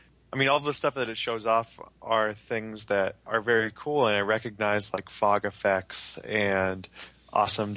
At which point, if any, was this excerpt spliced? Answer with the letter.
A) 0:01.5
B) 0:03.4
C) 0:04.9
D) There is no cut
D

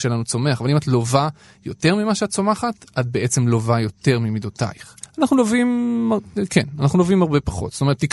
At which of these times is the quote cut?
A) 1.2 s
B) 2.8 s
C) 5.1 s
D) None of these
C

